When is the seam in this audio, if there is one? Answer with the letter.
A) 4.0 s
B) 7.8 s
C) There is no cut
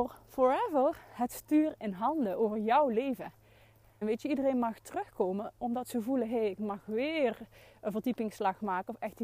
A